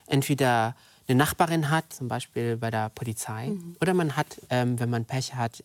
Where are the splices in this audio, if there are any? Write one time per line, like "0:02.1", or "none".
0:01.9